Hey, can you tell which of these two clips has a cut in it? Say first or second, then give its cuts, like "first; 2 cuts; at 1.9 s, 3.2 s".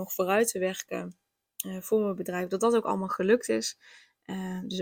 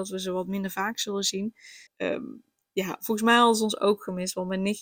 second; 1 cut; at 1.9 s